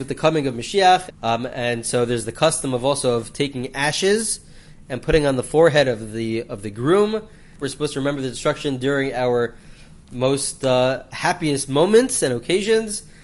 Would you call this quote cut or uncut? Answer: cut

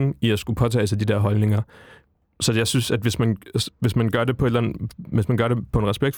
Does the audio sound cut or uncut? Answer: uncut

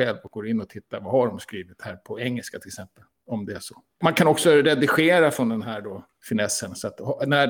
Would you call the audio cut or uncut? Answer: uncut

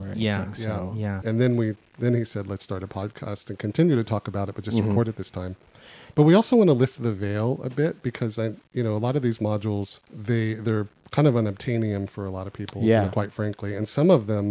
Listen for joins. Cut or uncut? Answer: cut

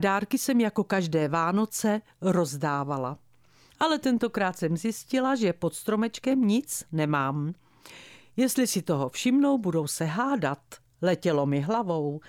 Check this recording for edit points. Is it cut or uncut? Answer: uncut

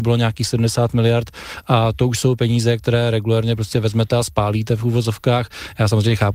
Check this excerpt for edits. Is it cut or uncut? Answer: uncut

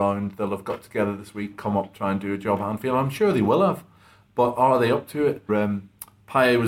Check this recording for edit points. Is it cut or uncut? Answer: cut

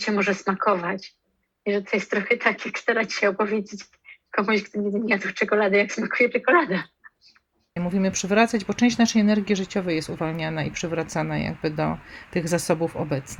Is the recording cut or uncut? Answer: cut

